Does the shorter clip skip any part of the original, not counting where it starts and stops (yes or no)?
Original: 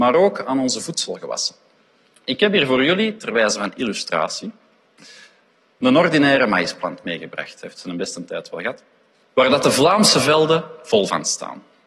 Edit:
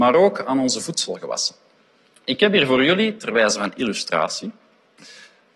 no